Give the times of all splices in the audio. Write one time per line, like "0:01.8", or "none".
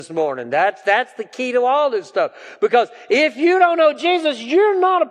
none